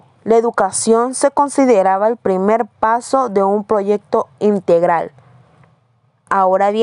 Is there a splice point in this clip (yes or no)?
no